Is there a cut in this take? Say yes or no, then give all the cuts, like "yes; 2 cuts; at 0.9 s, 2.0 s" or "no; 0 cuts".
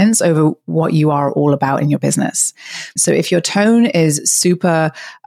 yes; 1 cut; at 3.0 s